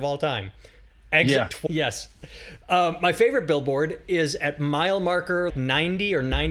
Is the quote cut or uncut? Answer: cut